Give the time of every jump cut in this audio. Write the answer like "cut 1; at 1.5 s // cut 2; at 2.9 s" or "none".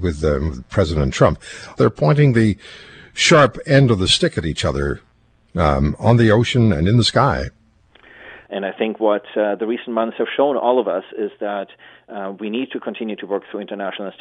cut 1; at 1.8 s // cut 2; at 8.5 s